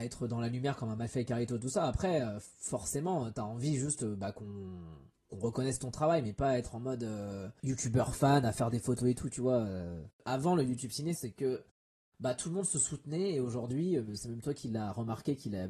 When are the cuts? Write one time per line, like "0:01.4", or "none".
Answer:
0:10.1
0:11.2